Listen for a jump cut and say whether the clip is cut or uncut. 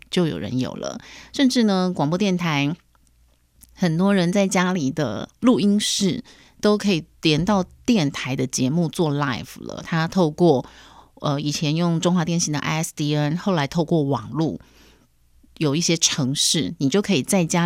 uncut